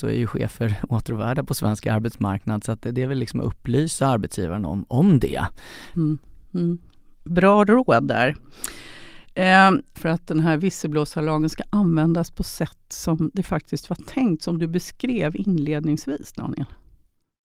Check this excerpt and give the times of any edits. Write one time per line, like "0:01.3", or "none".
0:05.9
0:09.9